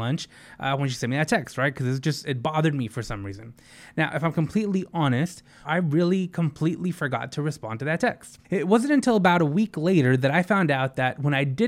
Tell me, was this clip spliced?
yes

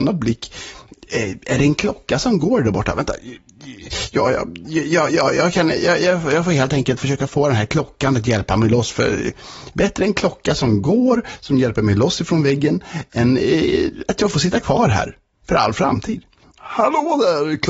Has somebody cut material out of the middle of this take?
no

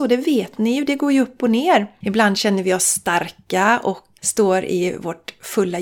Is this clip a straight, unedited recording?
no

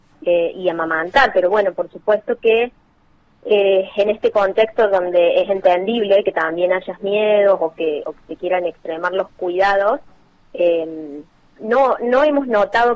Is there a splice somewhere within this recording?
no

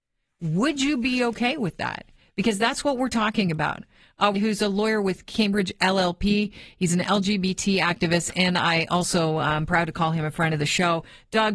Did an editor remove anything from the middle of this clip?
yes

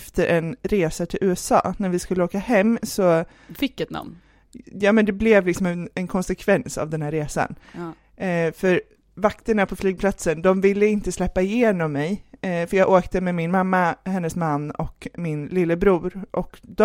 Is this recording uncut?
yes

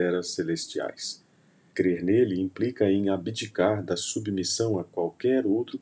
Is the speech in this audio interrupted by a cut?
yes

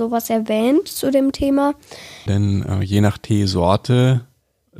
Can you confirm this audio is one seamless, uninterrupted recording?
no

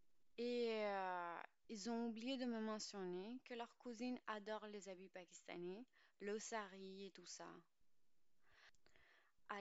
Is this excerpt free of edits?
yes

